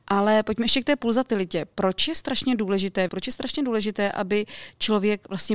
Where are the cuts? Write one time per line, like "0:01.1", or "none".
0:03.1